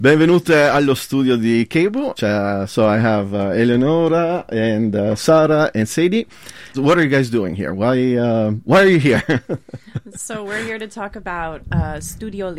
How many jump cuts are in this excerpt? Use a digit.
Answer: 2